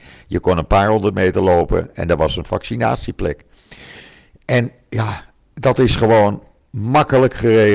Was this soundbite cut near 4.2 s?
no; 0 cuts

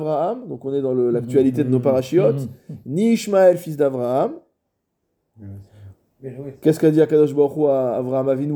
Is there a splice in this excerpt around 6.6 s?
no; 0 cuts

